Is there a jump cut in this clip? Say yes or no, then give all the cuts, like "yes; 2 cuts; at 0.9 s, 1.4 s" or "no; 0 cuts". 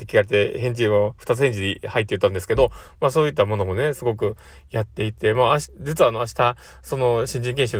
no; 0 cuts